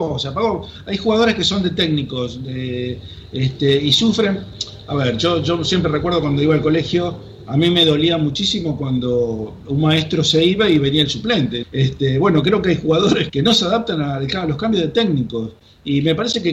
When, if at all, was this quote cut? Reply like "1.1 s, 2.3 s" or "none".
11.6 s, 13.3 s